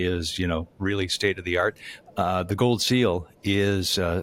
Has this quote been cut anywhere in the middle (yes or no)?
yes